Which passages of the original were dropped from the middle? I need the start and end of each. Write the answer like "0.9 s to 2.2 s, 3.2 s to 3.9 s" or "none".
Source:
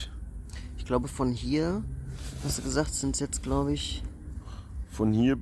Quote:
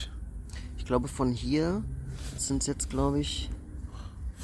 2.4 s to 2.9 s